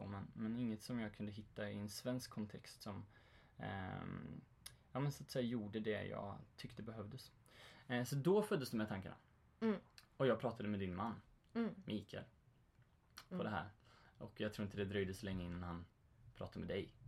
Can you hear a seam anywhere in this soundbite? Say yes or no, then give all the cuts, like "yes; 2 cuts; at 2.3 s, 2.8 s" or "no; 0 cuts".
yes; 2 cuts; at 10.1 s, 13.3 s